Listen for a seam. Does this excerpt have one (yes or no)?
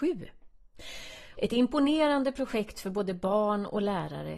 yes